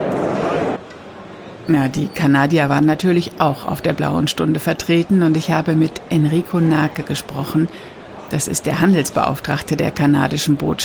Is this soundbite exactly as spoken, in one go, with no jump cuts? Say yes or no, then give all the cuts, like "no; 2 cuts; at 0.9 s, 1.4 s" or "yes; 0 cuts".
yes; 0 cuts